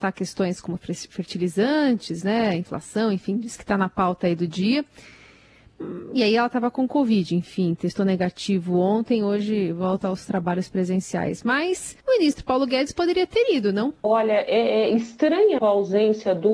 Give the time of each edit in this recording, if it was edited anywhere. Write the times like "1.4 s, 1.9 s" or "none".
12.0 s, 14.0 s, 15.6 s

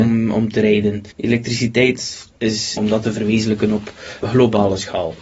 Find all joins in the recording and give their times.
1.1 s, 2.8 s, 4.2 s

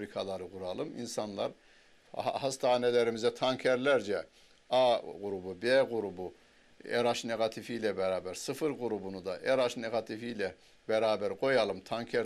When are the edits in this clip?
none

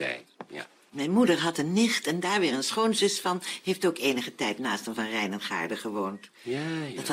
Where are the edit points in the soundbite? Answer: none

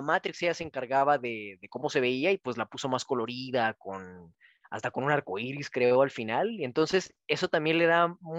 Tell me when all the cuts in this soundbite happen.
none

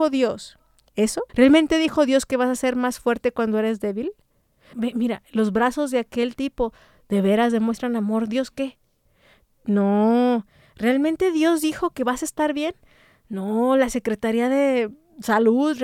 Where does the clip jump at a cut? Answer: 1.3 s, 4.7 s

